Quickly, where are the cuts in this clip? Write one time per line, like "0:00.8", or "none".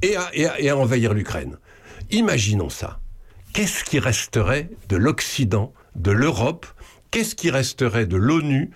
0:05.8